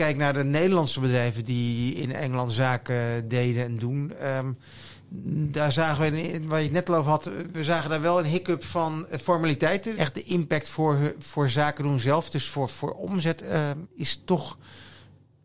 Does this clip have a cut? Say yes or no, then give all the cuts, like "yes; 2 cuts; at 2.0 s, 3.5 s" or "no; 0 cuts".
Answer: yes; 2 cuts; at 9.9 s, 13.8 s